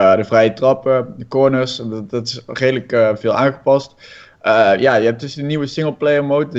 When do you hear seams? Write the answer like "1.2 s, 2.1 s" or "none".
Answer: none